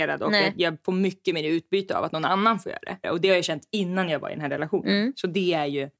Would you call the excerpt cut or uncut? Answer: cut